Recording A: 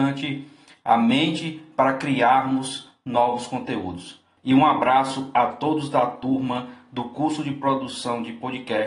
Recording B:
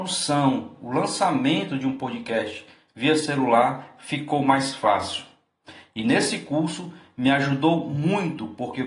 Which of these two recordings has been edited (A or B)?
A